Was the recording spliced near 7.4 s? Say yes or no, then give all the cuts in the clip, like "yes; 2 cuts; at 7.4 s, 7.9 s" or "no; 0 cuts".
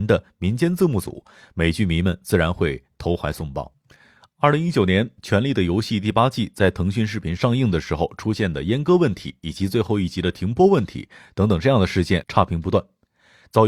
yes; 2 cuts; at 7.4 s, 12.2 s